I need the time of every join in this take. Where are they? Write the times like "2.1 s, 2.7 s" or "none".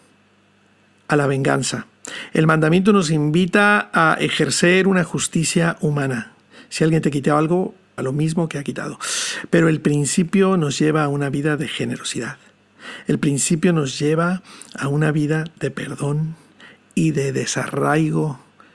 8.0 s